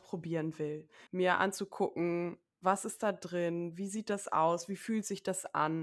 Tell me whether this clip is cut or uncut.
cut